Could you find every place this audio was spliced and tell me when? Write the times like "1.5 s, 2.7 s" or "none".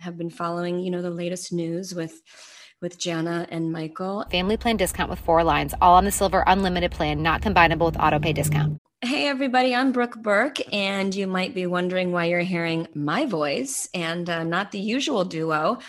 4.3 s